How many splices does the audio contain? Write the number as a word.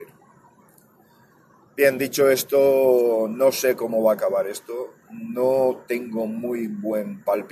zero